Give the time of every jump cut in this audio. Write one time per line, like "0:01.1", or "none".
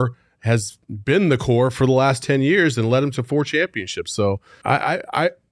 0:04.6